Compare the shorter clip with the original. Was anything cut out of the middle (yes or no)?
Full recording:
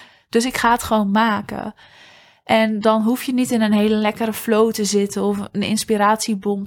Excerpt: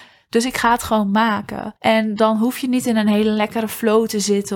yes